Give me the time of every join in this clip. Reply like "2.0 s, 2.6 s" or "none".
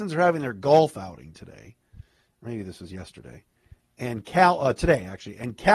none

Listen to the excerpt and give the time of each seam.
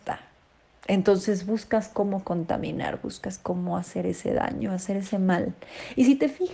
none

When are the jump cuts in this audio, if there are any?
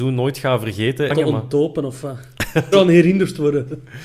1.1 s, 2.7 s

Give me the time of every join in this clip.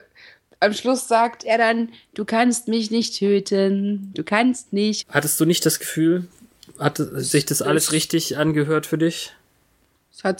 5.0 s

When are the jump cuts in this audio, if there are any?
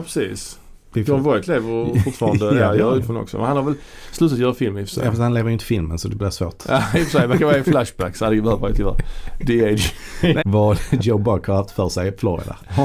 3.0 s, 10.4 s

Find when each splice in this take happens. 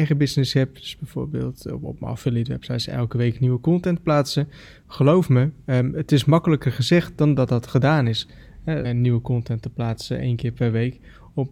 8.8 s

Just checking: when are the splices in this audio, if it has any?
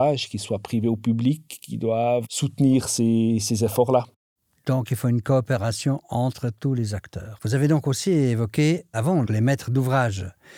7.4 s, 9.3 s

